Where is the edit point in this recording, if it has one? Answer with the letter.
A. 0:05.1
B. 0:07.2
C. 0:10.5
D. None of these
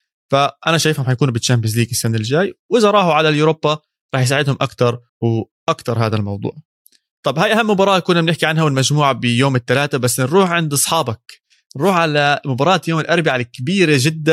A